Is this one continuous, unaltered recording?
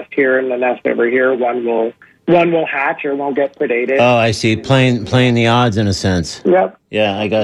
yes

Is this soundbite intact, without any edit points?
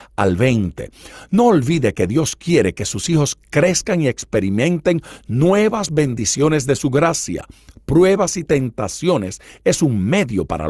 yes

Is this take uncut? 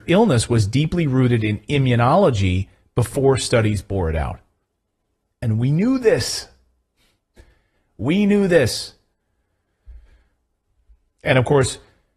yes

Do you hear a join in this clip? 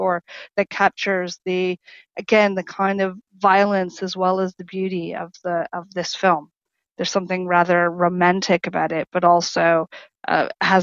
no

